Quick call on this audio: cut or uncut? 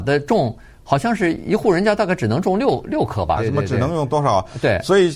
cut